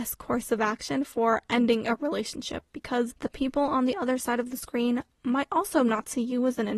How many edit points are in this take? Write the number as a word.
one